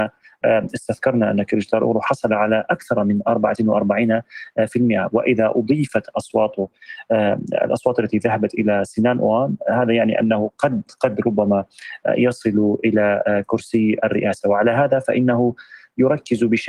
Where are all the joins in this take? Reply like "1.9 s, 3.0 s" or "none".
none